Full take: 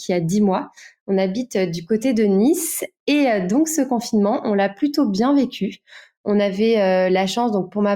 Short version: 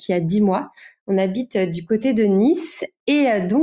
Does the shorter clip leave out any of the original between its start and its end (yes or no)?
no